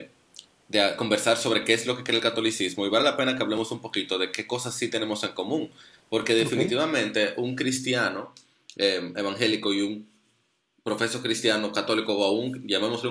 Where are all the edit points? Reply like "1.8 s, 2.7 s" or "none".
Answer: none

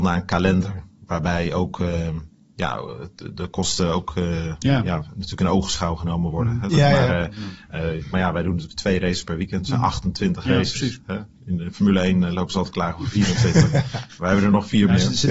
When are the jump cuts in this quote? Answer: 6.7 s, 8.1 s

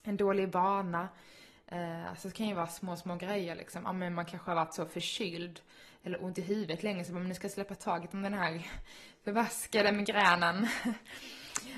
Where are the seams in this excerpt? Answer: none

